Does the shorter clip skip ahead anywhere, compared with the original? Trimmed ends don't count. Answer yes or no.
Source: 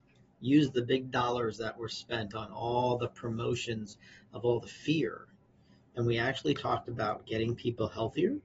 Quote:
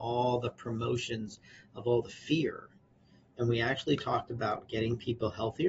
no